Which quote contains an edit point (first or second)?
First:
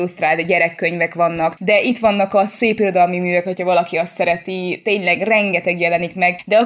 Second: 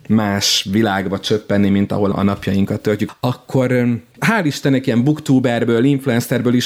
second